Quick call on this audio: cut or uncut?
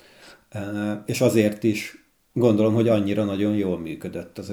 uncut